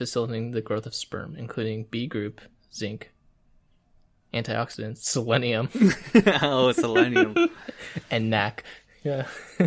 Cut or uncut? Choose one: uncut